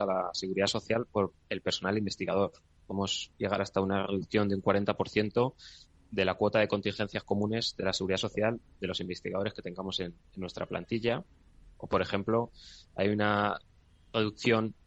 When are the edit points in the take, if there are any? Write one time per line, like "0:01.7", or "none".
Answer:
none